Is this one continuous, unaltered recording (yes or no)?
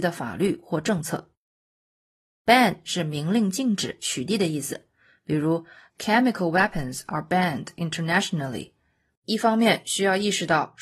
no